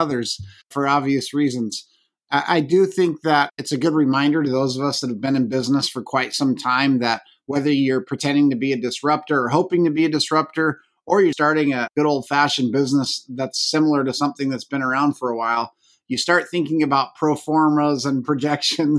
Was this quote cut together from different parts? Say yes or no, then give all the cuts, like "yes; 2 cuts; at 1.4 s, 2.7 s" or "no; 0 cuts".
yes; 1 cut; at 11.3 s